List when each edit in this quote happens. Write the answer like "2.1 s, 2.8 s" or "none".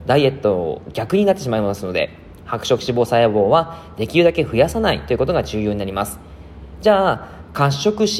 none